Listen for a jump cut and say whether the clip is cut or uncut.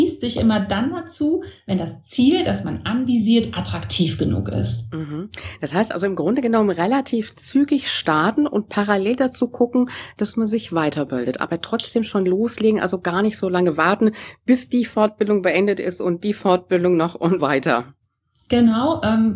cut